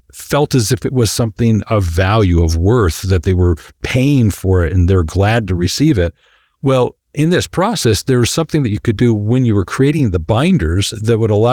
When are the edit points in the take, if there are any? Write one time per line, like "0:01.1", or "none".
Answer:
none